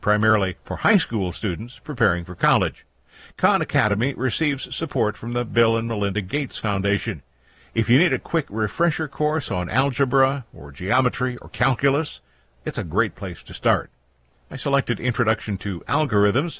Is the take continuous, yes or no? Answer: no